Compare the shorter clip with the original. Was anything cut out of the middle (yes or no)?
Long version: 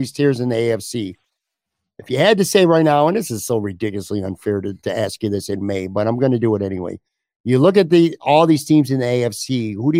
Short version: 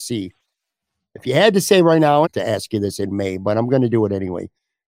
yes